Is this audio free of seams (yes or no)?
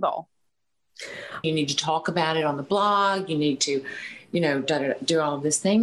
no